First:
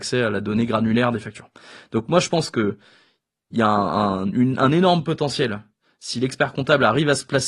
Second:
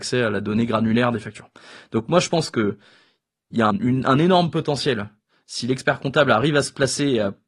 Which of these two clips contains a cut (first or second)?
second